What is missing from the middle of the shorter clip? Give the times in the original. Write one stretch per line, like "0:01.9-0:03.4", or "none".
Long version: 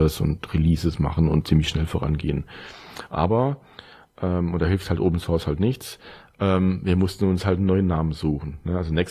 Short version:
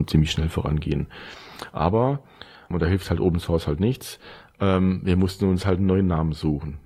0:04.1-0:04.5

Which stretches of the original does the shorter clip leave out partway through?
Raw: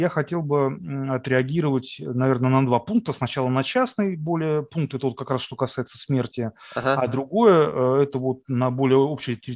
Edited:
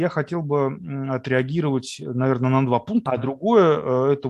0:03.1-0:07.0

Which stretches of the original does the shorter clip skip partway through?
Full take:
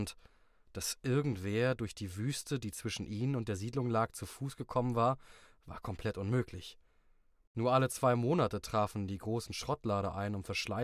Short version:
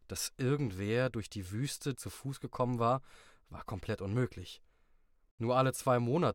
0:02.6-0:04.1

